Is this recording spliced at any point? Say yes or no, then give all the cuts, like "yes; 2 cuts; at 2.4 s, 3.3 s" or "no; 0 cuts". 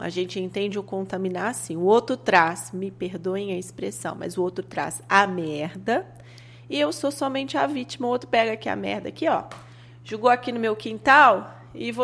no; 0 cuts